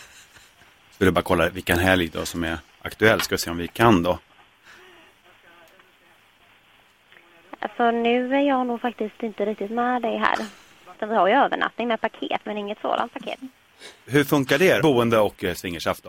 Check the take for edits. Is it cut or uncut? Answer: cut